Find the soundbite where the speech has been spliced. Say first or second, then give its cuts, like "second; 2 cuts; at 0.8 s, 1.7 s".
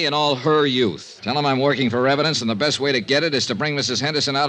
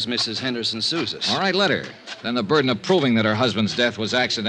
first; 1 cut; at 1.2 s